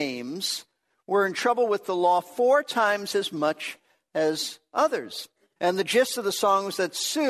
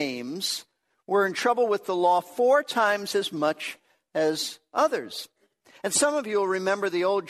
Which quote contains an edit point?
first; 1 cut; at 5.6 s

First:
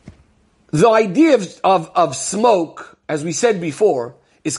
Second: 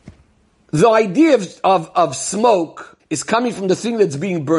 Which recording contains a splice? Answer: second; 1 cut; at 3.0 s

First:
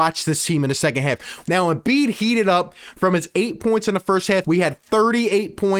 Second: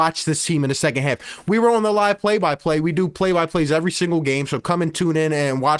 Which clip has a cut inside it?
first; 2 cuts; at 1.4 s, 4.4 s

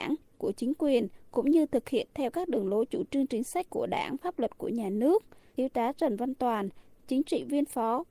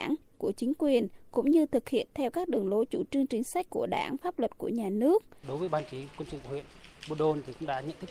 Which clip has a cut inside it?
second; 1 cut; at 5.4 s

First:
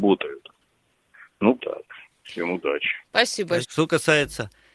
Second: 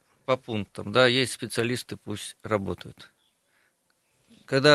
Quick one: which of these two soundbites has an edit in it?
first; 2 cuts; at 1.6 s, 3.6 s

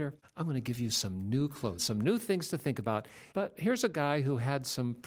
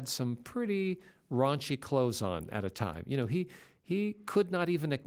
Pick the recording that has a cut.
first; 2 cuts; at 1.8 s, 3.3 s

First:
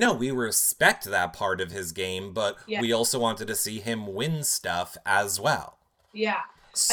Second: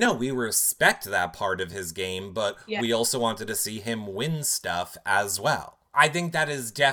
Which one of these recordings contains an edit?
second; 1 cut; at 5.9 s

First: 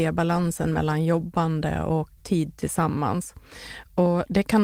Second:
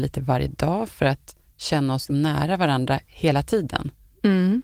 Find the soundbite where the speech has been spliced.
first; 1 cut; at 2.2 s

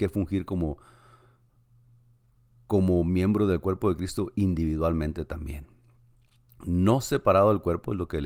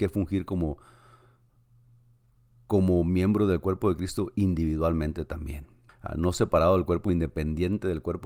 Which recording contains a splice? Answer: second; 1 cut; at 5.9 s

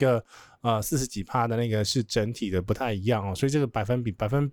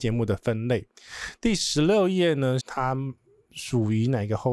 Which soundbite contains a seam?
second; 1 cut; at 2.6 s

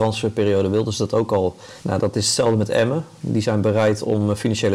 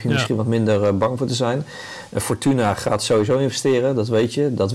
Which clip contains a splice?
first; 1 cut; at 1.8 s

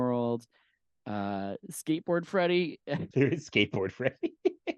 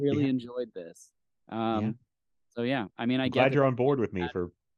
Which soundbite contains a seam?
first; 1 cut; at 3.1 s

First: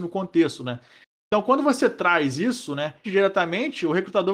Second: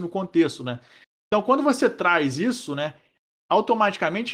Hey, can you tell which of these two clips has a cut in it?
first; 1 cut; at 3.0 s

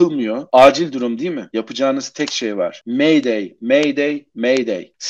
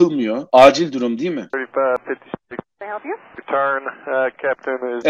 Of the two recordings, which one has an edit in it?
second; 2 cuts; at 1.5 s, 3.4 s

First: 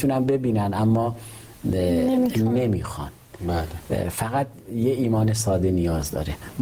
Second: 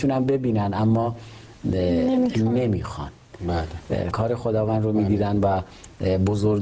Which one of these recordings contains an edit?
second; 1 cut; at 4.1 s

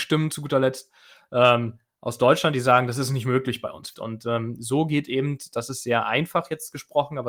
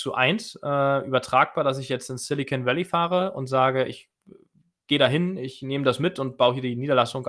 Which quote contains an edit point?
first; 1 cut; at 3.9 s

